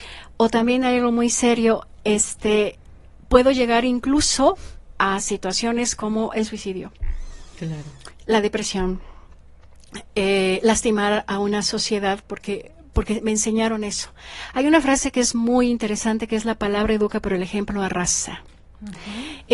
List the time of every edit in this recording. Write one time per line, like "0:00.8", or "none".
none